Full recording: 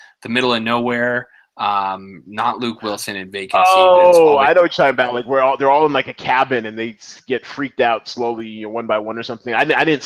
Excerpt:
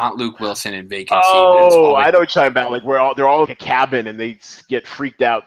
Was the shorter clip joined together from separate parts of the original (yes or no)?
yes